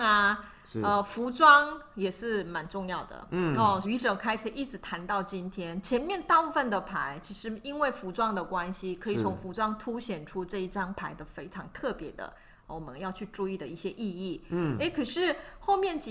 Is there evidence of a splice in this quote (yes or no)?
yes